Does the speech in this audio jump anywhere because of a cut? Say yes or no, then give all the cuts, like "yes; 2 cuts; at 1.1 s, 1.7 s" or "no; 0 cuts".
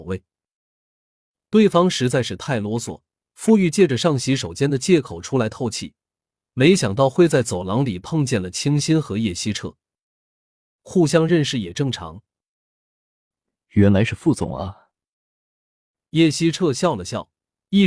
yes; 1 cut; at 10.8 s